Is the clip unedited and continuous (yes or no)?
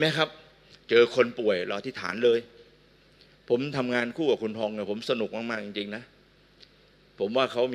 yes